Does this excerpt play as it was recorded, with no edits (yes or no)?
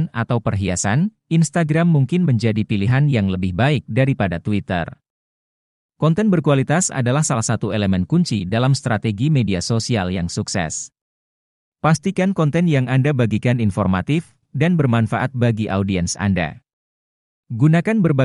no